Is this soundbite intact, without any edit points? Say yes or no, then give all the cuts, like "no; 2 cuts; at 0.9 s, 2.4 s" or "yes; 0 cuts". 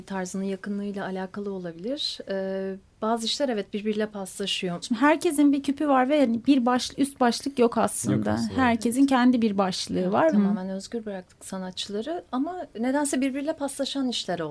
no; 2 cuts; at 4.8 s, 10.3 s